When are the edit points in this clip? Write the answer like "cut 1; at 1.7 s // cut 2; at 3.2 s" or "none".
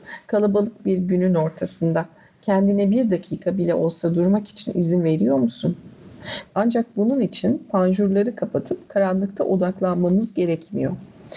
cut 1; at 6.5 s